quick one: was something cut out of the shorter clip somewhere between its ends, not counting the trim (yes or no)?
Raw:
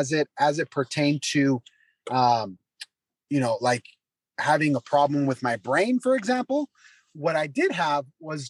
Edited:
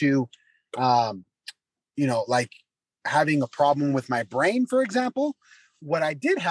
no